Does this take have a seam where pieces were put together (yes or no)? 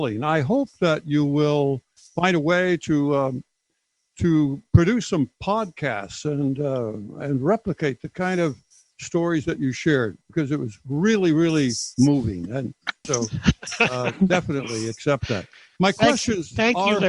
yes